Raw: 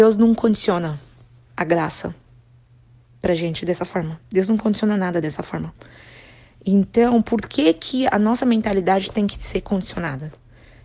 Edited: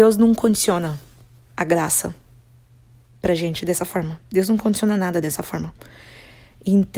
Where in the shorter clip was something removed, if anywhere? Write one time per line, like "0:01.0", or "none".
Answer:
none

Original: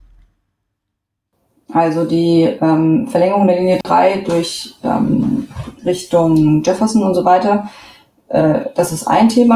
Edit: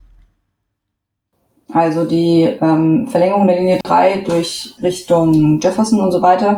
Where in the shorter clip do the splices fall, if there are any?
0:04.8

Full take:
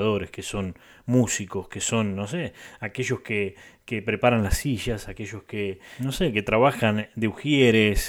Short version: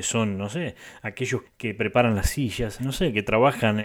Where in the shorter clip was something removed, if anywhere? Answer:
0:01.4
0:02.8

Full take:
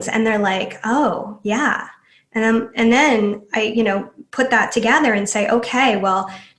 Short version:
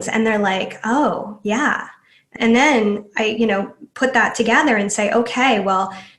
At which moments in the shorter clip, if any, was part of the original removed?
0:02.4

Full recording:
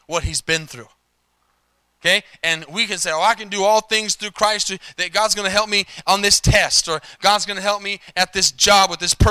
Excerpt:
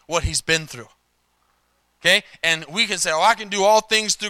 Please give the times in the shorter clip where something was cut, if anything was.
none

